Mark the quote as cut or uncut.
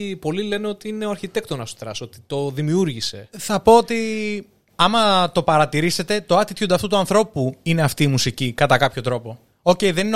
uncut